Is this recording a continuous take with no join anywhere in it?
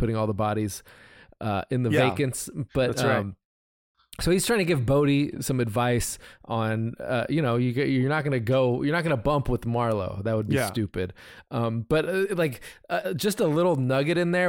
yes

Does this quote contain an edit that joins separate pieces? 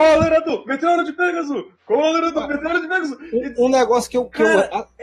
no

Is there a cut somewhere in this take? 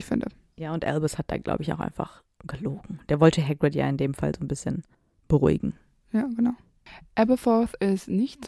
no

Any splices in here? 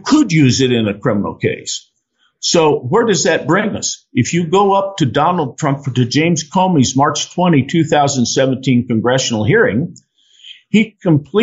no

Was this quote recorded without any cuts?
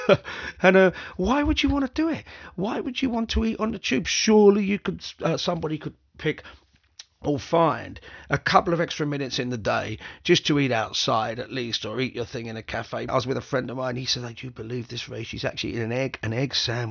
no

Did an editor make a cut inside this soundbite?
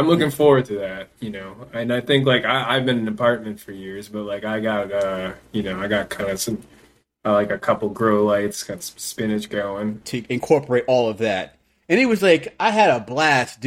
yes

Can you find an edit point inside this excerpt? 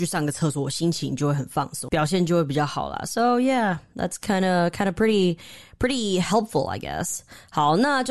yes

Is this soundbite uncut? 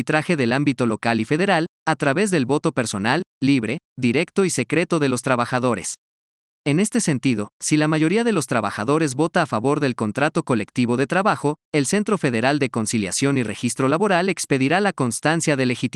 yes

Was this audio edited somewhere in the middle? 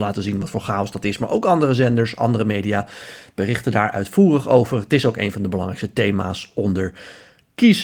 no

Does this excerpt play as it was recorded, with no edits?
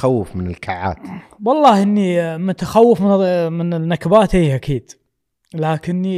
yes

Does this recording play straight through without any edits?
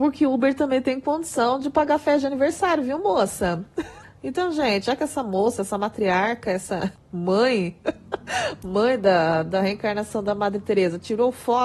yes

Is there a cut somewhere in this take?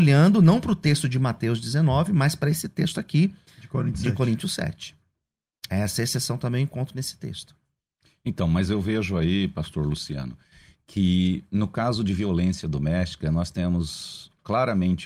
no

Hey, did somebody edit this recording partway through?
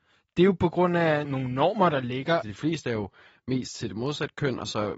yes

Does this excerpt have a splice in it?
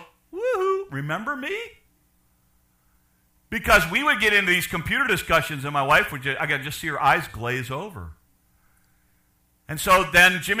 no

